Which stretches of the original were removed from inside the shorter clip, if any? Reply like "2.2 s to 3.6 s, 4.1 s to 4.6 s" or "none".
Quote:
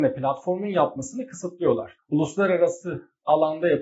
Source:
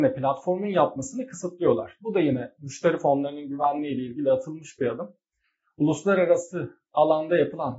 2.0 s to 5.7 s